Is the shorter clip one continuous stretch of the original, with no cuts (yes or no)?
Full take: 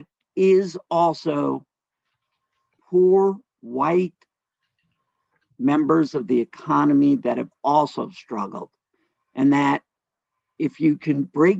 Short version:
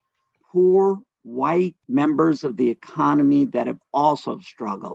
no